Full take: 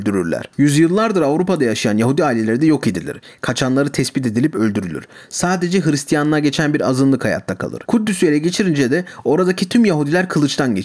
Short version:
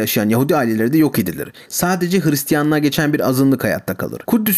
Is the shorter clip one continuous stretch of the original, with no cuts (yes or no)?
no